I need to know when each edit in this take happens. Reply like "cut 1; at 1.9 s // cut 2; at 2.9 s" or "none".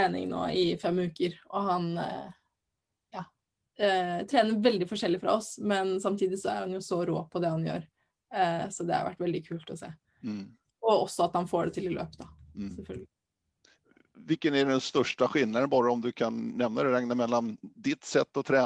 none